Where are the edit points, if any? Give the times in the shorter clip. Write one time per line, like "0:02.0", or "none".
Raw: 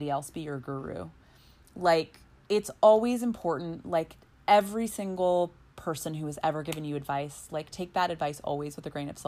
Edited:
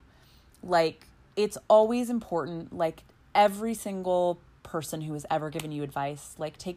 none